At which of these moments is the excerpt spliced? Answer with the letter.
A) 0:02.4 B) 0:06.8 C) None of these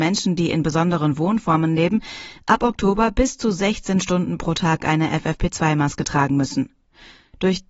A